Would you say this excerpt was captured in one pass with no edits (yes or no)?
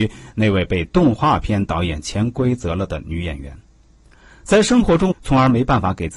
no